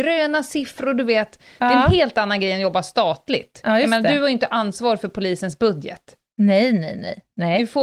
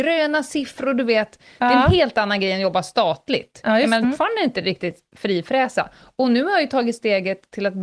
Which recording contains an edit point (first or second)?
second